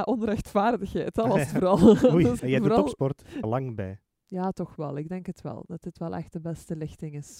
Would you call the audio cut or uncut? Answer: cut